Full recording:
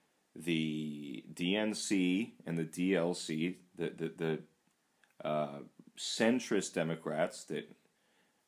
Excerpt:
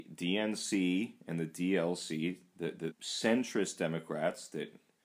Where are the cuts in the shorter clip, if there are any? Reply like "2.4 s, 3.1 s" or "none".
2.9 s